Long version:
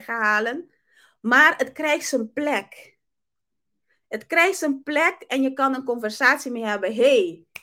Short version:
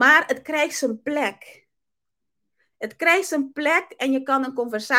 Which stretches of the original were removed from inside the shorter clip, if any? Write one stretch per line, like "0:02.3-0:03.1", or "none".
none